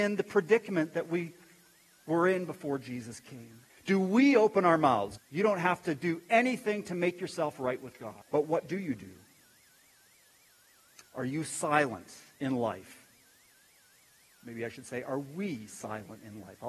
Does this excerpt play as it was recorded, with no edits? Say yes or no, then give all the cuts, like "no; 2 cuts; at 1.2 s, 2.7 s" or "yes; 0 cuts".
no; 3 cuts; at 3.7 s, 5.2 s, 8.2 s